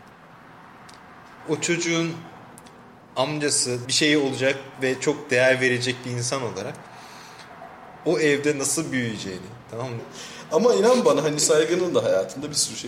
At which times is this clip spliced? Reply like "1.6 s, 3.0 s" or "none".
3.8 s, 10.0 s